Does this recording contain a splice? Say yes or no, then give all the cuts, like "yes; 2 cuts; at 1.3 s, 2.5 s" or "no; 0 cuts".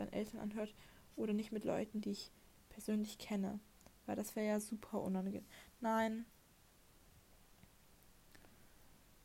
no; 0 cuts